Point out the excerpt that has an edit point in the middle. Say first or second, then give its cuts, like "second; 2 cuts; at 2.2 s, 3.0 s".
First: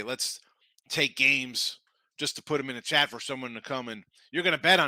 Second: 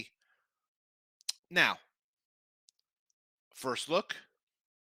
second; 1 cut; at 1.4 s